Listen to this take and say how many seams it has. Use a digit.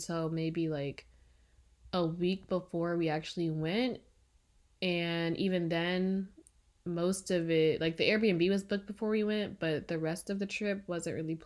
0